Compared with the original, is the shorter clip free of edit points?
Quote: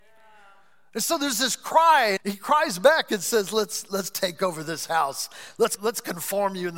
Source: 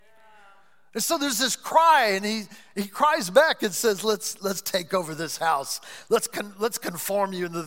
no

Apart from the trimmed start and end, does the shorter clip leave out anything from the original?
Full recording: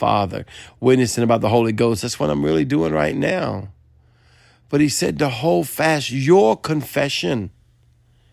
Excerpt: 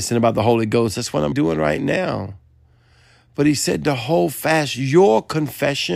yes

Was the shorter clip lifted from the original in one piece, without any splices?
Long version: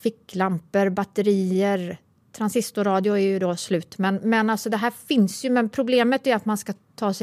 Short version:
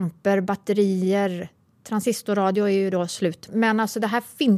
no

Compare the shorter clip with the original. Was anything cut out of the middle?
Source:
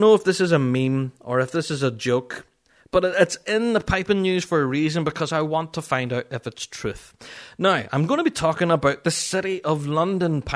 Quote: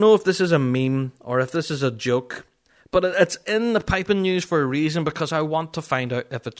no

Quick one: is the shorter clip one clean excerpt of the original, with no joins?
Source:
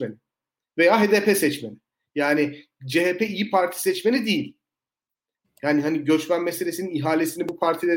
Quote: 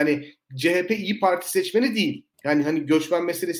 no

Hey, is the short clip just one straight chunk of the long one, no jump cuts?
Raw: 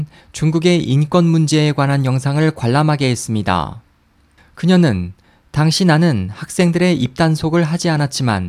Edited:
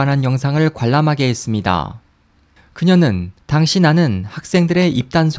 no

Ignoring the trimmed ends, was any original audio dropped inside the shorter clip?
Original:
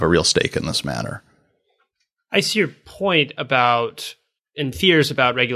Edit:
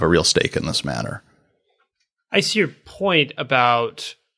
no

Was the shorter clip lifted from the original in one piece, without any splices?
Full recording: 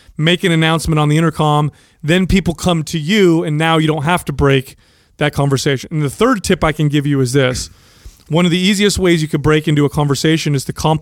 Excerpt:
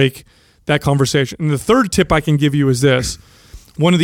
yes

